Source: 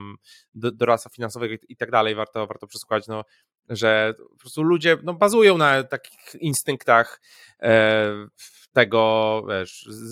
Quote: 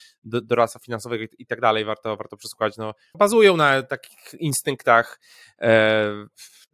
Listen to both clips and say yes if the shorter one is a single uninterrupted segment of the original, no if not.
no